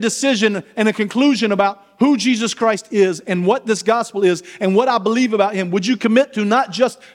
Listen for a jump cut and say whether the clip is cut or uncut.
uncut